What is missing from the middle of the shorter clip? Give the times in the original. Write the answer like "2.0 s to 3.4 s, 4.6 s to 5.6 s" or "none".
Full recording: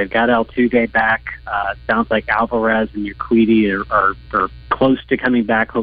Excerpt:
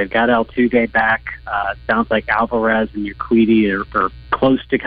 3.9 s to 4.2 s